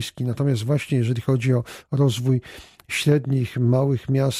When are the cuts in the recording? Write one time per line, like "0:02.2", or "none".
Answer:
none